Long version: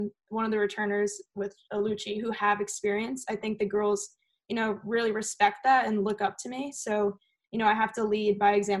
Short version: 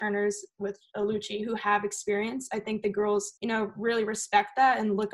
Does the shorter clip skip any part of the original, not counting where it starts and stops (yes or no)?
yes